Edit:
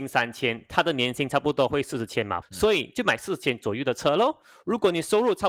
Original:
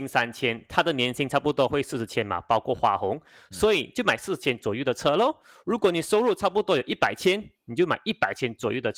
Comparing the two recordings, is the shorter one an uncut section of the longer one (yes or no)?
no